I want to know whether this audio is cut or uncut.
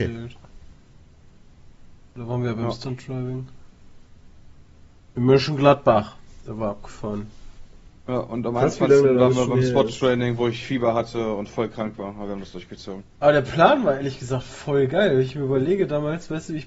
uncut